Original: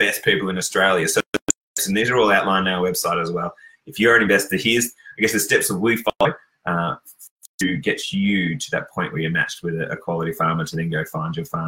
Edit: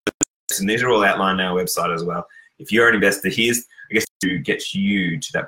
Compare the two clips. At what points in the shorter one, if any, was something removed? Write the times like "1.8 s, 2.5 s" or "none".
4.0 s